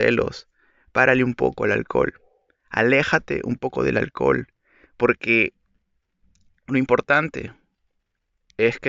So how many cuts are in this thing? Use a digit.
0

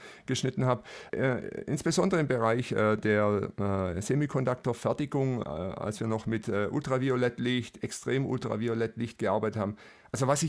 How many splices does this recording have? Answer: 2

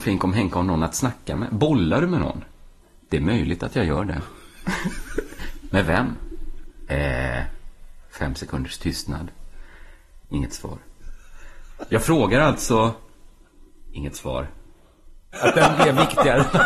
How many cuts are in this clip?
2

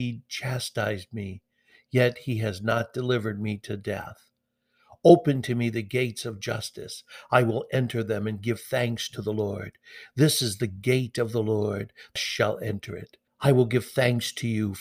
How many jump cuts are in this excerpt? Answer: 2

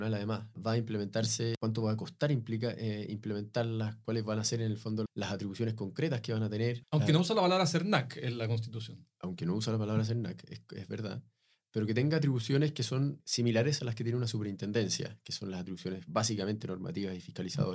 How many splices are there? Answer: 2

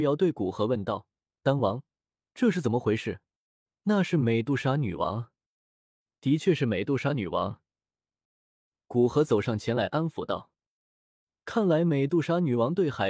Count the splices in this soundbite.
1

